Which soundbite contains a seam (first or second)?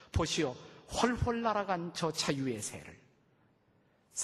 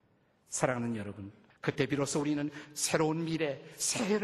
second